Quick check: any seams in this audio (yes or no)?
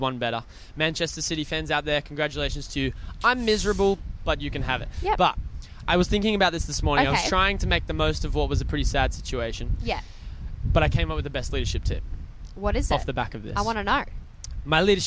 no